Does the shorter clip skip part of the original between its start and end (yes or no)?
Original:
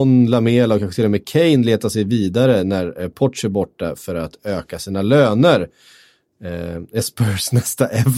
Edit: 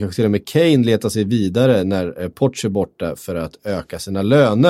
no